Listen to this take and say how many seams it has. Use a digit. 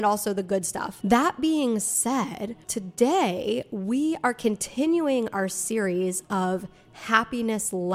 2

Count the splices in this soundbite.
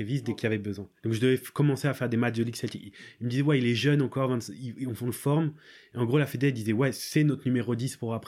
1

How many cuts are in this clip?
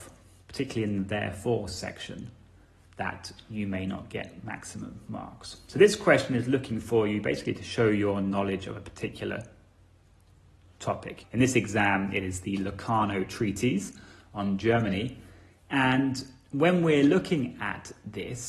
1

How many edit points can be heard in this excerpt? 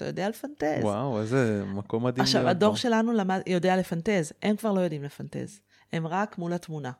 0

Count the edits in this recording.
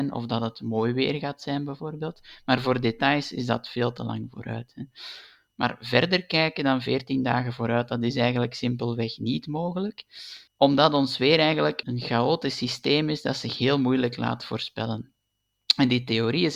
2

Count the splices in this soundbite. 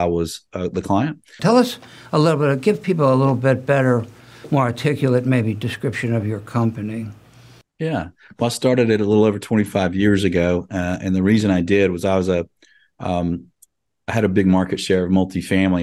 1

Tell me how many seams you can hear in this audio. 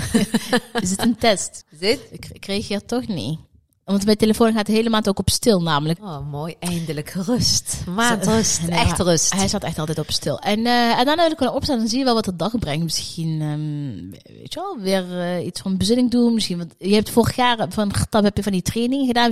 2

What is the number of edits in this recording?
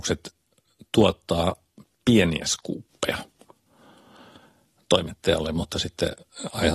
0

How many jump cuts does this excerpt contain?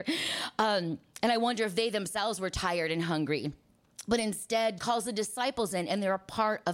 1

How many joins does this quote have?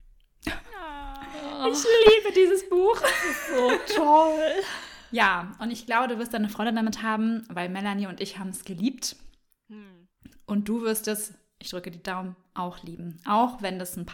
0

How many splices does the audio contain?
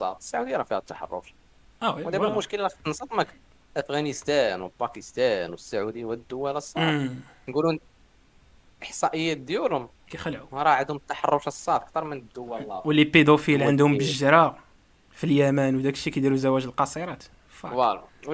0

